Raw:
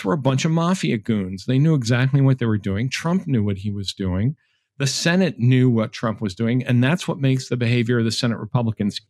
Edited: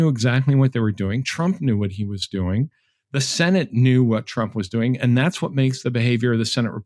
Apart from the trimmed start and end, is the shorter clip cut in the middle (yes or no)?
no